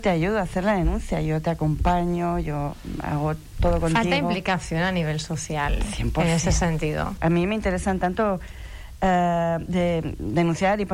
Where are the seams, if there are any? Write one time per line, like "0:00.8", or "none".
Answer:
0:07.2